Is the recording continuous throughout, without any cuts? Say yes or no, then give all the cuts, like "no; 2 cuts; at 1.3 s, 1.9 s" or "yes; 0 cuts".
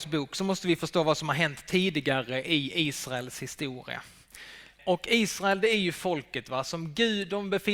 yes; 0 cuts